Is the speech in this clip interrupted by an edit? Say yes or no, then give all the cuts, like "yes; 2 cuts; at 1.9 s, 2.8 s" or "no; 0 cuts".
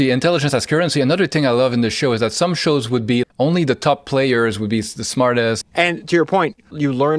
yes; 2 cuts; at 3.2 s, 5.6 s